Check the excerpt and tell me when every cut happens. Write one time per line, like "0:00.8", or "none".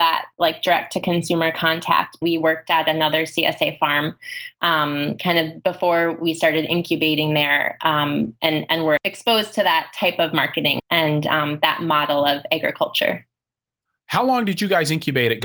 0:02.2
0:09.0
0:10.8